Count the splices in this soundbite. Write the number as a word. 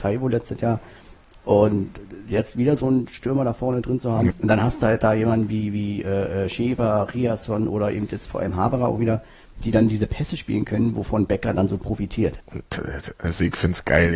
two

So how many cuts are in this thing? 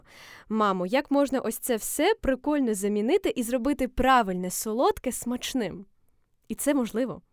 zero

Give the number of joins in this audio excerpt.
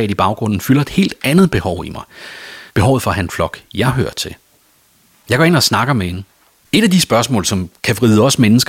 two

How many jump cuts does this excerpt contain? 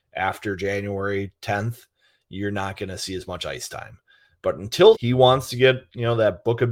one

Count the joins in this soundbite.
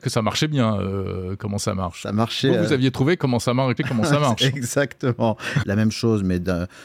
two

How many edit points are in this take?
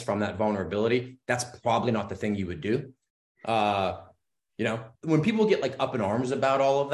two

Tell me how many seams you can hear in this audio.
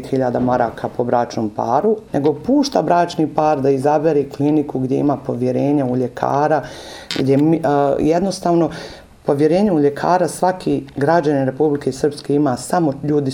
one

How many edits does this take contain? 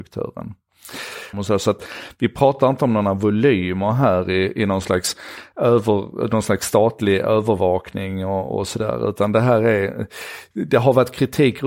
one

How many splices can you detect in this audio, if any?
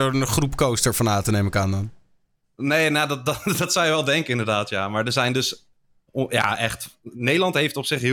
one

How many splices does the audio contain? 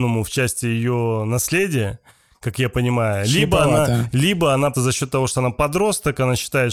one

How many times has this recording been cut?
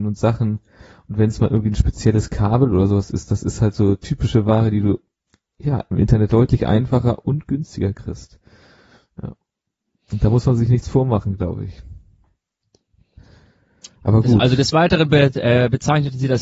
one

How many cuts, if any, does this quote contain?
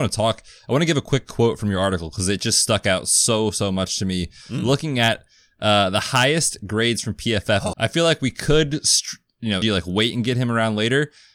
two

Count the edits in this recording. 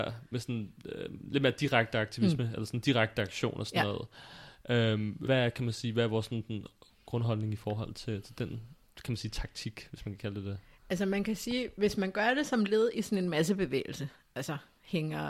one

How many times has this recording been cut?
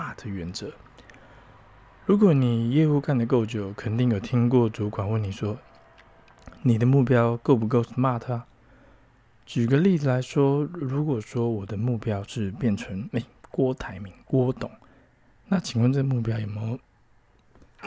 zero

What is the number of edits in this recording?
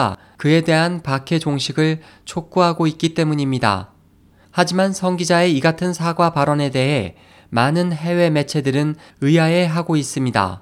one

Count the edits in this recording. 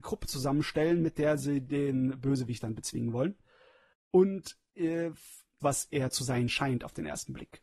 one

